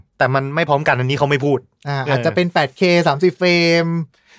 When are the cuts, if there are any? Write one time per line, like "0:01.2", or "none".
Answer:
none

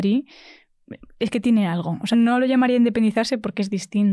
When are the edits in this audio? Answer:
0:02.1

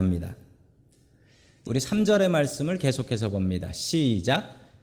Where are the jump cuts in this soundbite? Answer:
0:01.7

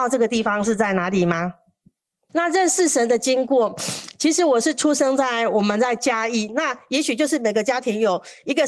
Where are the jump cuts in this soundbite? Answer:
0:02.3
0:06.5

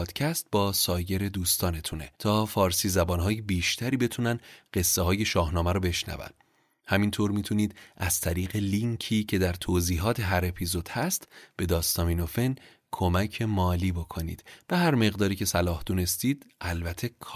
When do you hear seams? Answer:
0:02.1

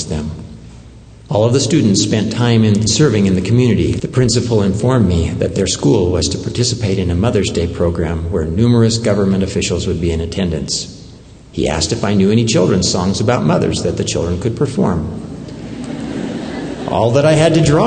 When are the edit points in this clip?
0:04.0

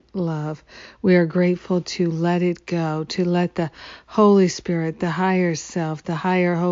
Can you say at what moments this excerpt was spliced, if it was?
0:01.0

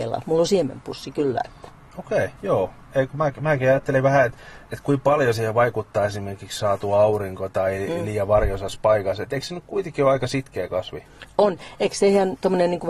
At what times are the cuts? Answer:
0:02.4
0:04.3

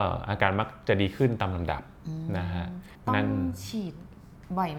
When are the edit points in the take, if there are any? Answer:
0:02.9

